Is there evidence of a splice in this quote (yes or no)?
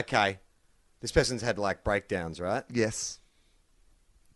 no